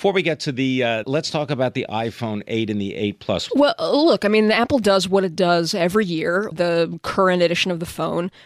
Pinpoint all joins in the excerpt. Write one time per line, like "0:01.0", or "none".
0:01.0
0:03.5
0:06.5